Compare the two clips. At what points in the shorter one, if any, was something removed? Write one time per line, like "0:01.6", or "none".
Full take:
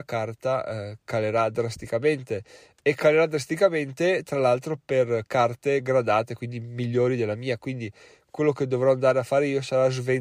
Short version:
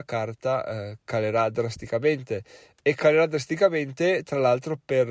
none